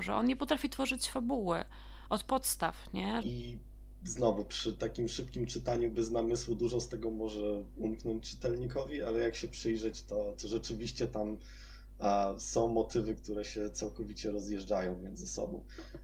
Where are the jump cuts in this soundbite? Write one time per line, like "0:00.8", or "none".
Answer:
0:03.2